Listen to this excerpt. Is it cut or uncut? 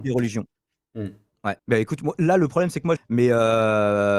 cut